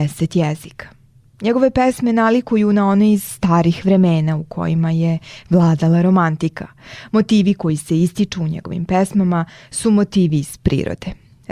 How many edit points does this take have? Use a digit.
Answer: 0